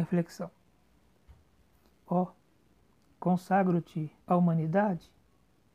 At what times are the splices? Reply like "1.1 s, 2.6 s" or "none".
1.9 s, 4.2 s